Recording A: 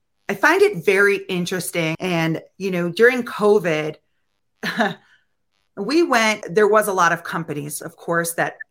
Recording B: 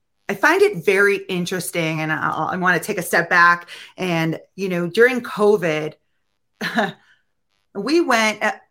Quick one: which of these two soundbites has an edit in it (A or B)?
A